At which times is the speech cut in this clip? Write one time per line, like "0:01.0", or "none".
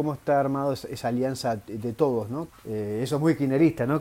0:02.5